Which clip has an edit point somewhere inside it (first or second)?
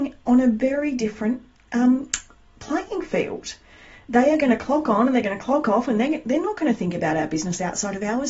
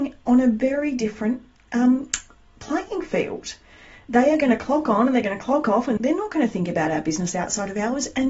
second